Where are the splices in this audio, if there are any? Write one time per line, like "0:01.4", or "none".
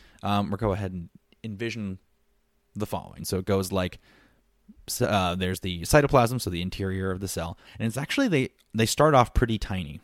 0:03.2
0:07.6